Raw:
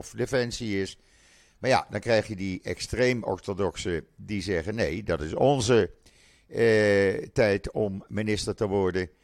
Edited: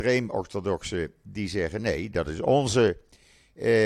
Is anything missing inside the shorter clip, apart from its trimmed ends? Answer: no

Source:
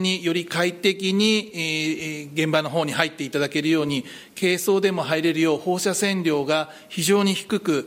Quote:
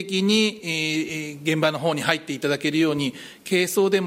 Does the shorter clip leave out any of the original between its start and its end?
no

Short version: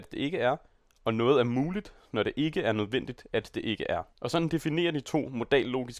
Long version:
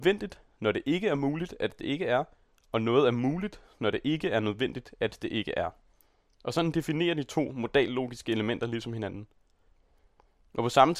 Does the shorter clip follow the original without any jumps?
no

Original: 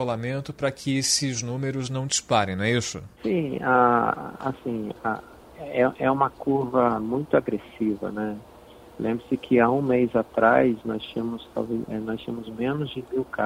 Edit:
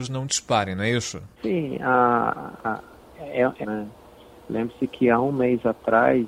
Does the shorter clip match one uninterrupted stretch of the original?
no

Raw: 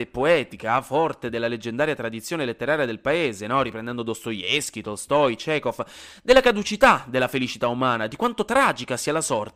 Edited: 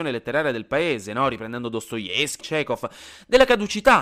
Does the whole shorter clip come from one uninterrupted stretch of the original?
no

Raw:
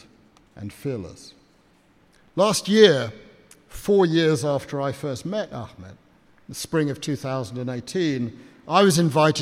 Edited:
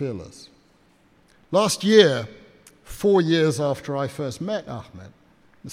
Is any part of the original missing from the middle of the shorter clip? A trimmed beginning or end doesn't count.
no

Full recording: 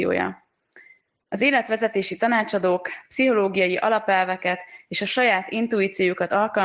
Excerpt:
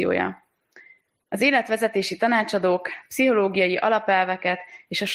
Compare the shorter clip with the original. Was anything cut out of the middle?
no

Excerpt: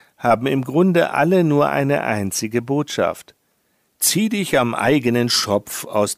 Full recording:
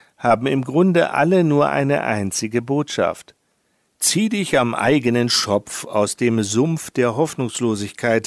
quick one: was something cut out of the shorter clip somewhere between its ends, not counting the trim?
no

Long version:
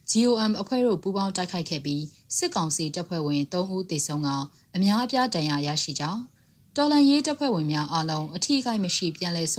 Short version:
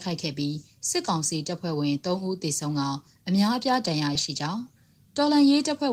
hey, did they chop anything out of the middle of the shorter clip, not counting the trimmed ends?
yes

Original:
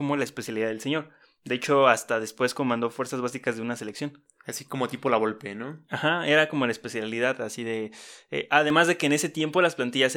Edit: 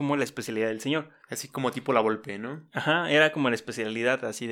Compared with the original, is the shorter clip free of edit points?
no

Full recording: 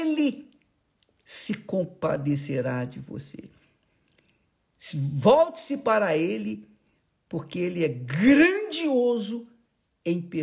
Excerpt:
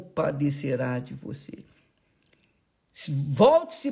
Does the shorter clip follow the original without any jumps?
yes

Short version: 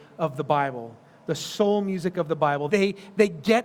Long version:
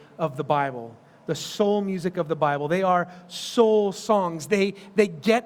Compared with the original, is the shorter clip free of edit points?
no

